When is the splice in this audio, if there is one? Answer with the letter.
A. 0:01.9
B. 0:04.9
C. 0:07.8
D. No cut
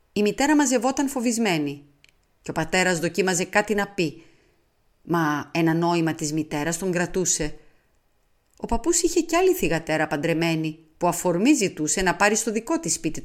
D